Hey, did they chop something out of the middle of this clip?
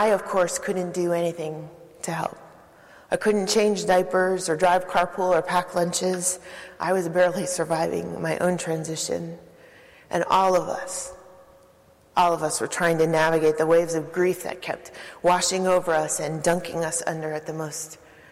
no; 0 cuts

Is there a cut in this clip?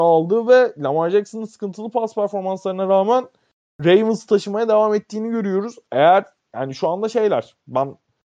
no; 0 cuts

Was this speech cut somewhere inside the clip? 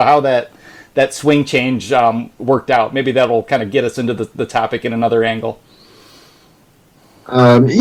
no; 0 cuts

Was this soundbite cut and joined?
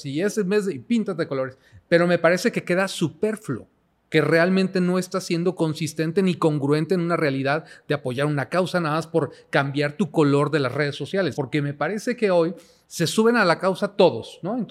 yes; 2 cuts; at 11.3 s, 12.8 s

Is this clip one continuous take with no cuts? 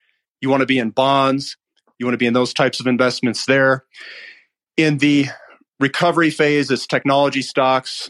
yes; 0 cuts

